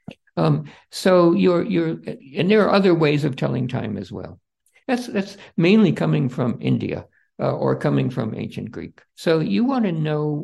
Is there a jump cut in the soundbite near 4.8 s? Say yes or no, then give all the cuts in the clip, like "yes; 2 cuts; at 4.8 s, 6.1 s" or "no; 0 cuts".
yes; 2 cuts; at 4.8 s, 9.1 s